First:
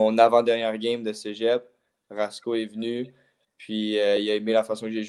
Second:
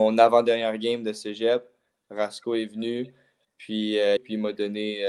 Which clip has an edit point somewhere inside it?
second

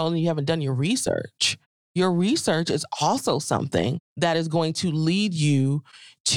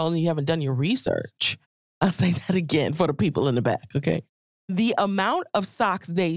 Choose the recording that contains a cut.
second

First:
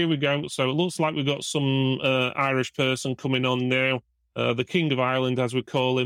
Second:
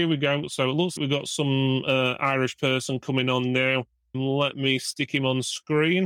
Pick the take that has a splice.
second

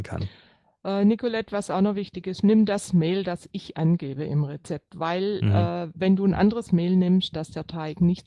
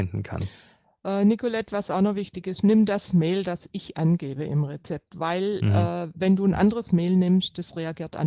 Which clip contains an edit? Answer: first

